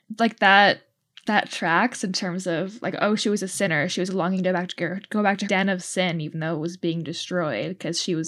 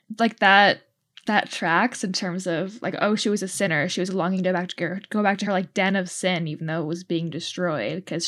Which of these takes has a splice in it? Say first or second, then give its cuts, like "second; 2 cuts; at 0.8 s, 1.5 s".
first; 1 cut; at 5.5 s